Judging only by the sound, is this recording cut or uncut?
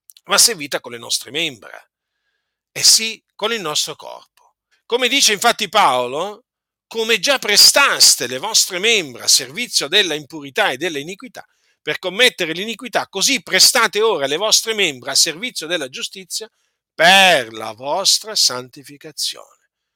cut